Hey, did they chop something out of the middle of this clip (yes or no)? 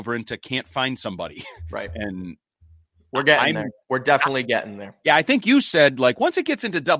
no